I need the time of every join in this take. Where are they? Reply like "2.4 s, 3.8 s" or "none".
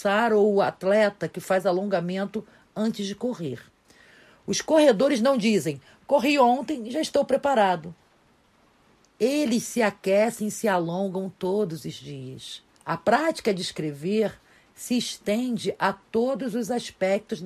12.7 s